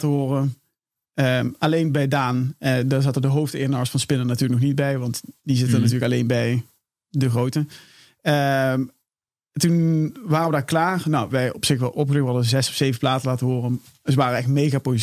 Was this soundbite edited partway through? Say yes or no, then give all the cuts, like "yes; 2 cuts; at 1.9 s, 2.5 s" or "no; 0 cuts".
no; 0 cuts